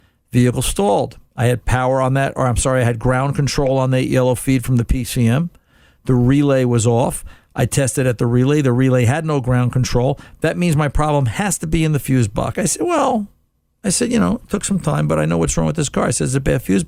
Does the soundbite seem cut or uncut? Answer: cut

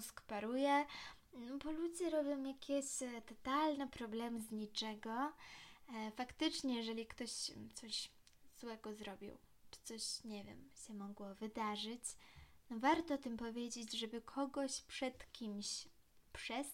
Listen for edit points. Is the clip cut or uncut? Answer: uncut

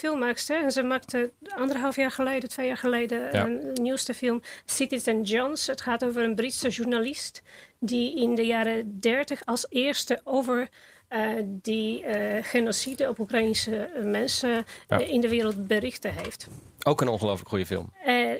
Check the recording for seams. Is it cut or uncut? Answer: uncut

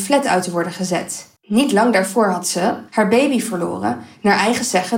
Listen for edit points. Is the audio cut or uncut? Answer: cut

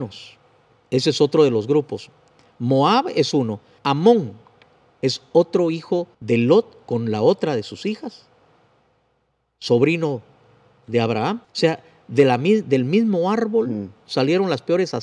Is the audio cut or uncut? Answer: cut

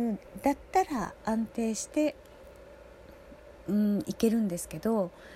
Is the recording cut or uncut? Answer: uncut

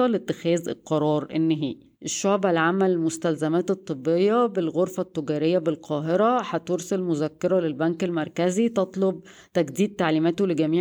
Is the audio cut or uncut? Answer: cut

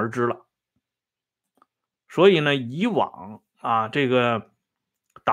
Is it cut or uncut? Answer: uncut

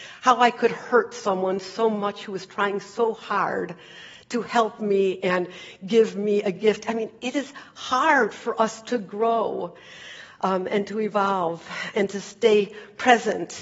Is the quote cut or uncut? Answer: uncut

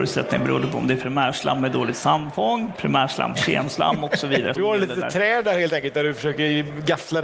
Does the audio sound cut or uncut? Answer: cut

